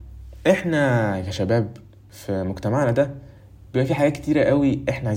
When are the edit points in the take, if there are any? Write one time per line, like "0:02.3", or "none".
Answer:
none